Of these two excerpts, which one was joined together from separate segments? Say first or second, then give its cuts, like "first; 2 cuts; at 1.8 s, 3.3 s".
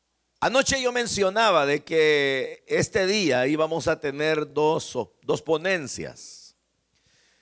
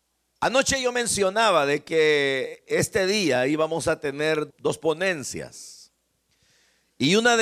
second; 1 cut; at 4.5 s